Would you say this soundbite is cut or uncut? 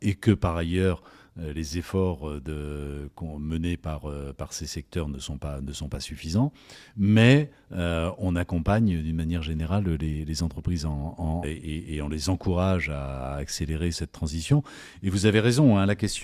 cut